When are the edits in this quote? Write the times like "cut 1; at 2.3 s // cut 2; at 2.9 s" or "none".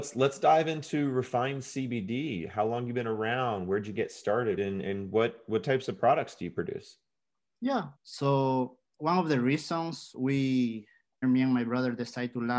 cut 1; at 4.6 s // cut 2; at 8.0 s // cut 3; at 11.2 s